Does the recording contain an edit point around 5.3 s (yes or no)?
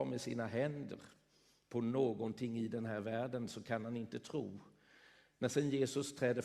no